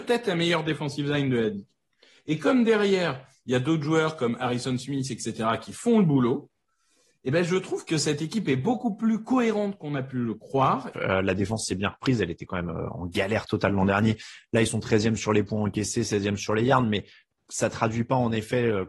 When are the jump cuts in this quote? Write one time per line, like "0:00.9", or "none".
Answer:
0:10.9